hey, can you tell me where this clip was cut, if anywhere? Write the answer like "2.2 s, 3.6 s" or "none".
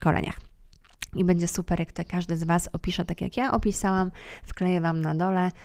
1.1 s